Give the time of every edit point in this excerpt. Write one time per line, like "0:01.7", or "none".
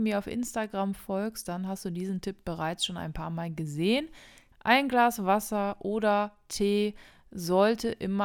0:04.5